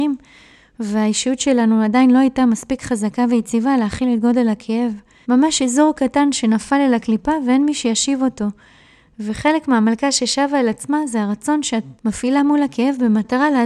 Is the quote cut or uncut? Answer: cut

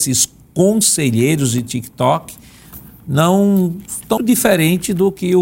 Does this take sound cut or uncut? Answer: cut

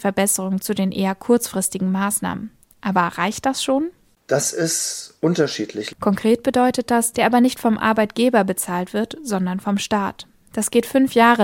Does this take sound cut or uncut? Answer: cut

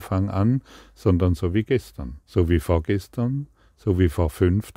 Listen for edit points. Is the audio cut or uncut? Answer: cut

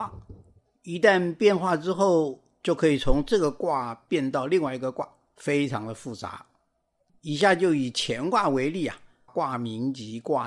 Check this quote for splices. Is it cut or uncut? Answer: cut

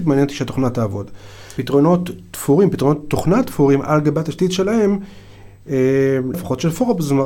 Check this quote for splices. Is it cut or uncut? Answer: cut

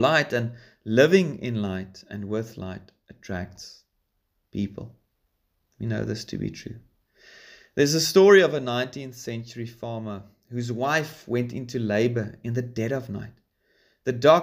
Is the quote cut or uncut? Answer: uncut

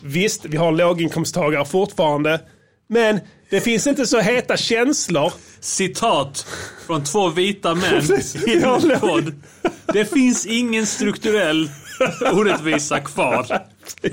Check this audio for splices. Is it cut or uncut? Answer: uncut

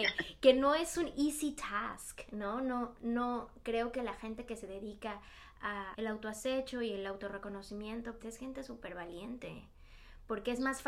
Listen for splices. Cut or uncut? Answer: cut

